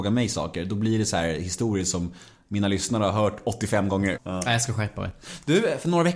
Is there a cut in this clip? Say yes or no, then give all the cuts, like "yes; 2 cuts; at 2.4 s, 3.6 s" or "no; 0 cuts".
yes; 1 cut; at 4.1 s